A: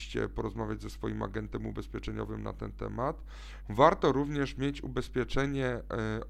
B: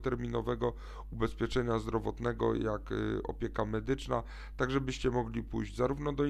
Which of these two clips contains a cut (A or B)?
A